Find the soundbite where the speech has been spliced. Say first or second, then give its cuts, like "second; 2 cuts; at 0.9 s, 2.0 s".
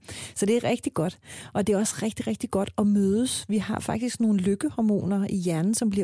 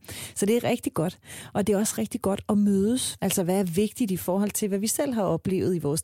second; 2 cuts; at 2.0 s, 3.2 s